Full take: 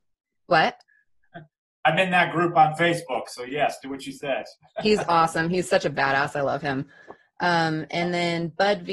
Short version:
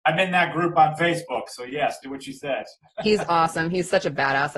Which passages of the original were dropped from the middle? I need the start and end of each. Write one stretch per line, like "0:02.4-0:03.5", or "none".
none

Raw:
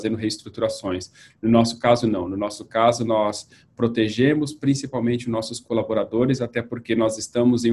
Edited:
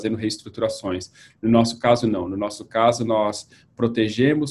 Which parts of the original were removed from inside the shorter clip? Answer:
none

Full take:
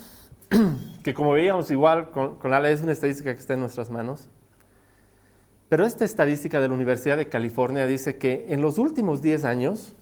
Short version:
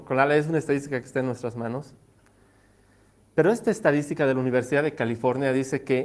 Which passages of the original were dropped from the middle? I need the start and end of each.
none

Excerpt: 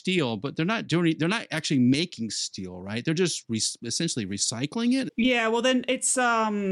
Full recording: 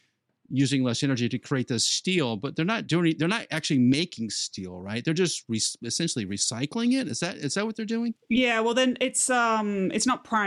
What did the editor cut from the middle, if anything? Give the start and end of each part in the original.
0:07.1-0:08.2

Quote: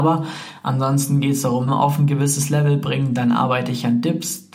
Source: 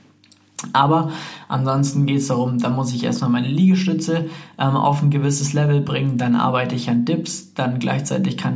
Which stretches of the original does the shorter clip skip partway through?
0:02.5-0:04.7

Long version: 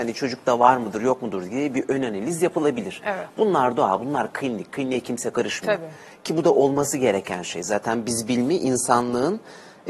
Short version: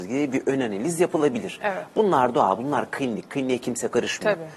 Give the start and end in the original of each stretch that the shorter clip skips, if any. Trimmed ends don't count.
none

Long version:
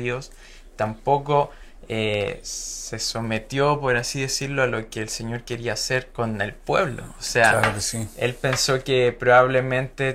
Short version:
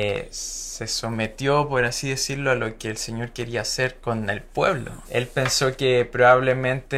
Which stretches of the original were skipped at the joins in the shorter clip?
0:07.2-0:08.1

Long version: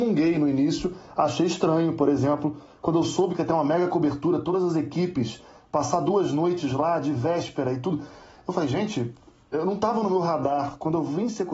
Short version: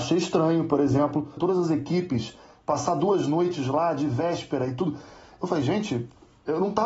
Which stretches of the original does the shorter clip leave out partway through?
0:02.7-0:04.4

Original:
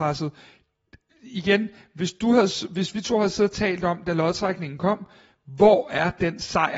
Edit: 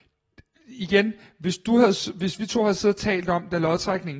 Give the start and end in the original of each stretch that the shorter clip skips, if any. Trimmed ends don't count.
none

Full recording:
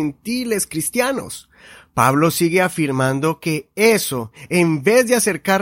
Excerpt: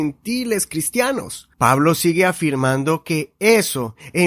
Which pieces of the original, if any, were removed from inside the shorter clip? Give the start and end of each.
0:01.5-0:01.9

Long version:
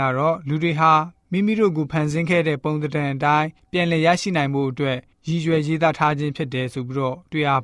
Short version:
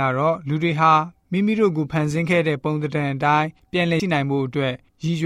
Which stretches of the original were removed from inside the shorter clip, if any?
0:04.0-0:04.2

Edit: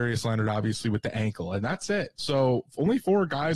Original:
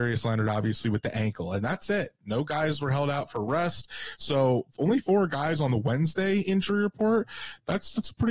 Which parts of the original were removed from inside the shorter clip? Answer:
0:02.2-0:04.2

